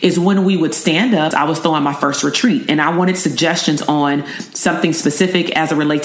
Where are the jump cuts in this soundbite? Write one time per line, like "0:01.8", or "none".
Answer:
0:01.3